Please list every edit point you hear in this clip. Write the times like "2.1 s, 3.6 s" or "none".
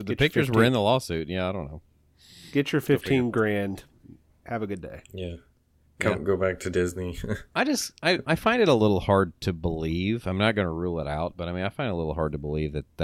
8.2 s